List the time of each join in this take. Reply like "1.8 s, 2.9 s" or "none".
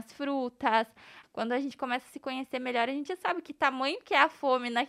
1.2 s